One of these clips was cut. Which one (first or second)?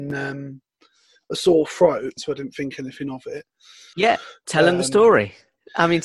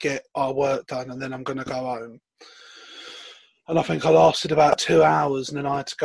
first